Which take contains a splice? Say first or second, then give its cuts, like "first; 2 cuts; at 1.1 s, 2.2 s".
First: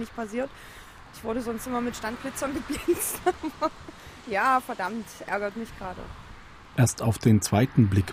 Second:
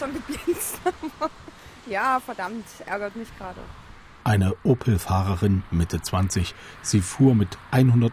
second; 1 cut; at 4.2 s